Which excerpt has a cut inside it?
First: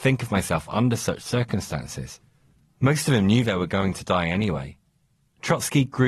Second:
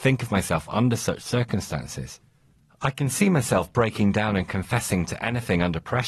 first; 1 cut; at 2.7 s

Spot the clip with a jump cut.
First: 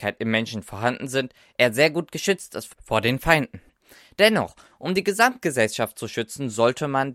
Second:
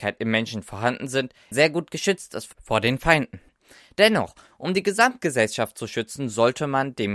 second; 1 cut; at 1.5 s

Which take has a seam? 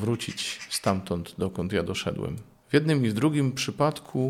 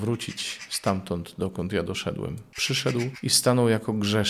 second; 1 cut; at 2.5 s

